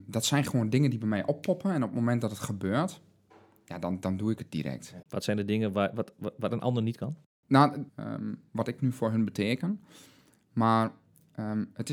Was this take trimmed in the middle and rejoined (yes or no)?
yes